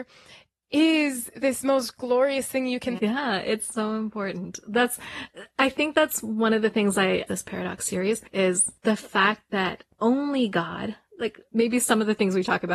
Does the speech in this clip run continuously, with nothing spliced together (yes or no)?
no